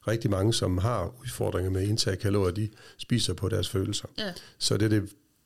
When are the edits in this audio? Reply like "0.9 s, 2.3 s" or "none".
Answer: none